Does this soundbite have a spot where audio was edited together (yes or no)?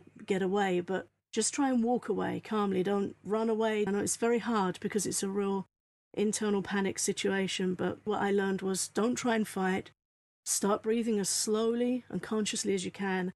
yes